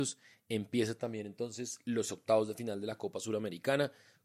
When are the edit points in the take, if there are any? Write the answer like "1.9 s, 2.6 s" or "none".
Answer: none